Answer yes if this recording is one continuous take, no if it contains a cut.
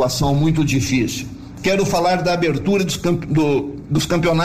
yes